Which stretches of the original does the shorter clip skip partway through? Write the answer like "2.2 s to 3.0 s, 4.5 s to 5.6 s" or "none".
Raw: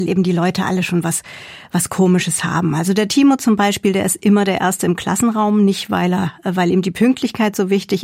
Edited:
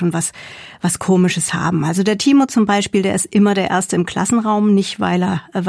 none